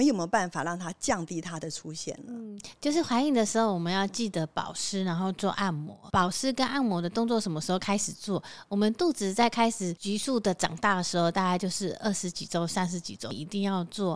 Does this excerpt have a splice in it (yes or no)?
no